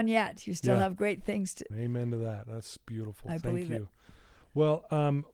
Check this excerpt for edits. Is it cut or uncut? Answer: cut